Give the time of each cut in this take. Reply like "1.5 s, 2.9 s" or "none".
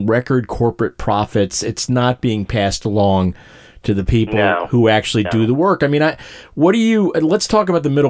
none